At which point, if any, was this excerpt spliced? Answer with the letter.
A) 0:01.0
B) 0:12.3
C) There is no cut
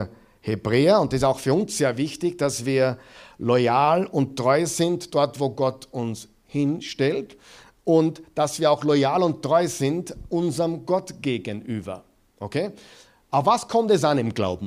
C